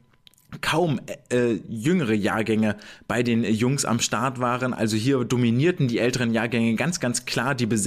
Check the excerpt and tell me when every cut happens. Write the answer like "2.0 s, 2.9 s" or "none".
none